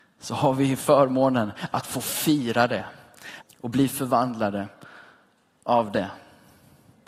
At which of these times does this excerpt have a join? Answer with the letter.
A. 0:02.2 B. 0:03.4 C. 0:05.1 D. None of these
B